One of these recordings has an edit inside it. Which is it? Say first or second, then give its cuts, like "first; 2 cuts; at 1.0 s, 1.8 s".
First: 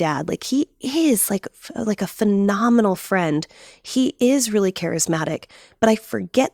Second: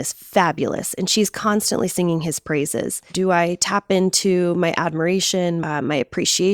second; 2 cuts; at 3.1 s, 5.6 s